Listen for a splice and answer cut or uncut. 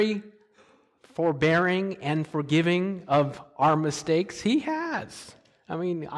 uncut